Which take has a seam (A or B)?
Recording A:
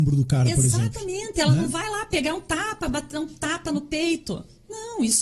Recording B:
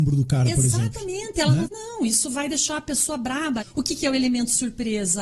B